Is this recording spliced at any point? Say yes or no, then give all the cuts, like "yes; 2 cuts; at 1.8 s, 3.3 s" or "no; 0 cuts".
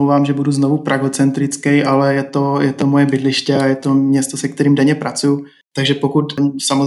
yes; 1 cut; at 5.7 s